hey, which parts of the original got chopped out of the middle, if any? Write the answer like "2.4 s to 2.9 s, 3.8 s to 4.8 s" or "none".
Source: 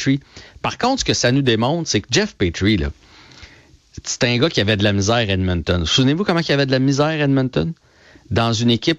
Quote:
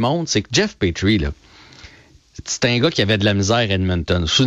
none